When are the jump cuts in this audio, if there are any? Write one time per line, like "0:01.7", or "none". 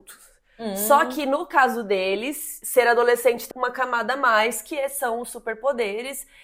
0:03.5